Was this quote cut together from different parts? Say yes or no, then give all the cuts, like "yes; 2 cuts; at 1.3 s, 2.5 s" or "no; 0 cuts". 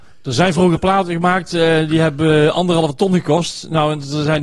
no; 0 cuts